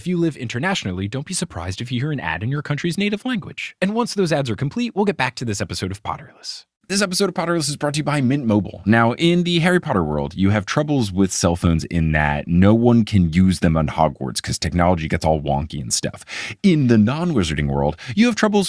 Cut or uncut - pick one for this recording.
uncut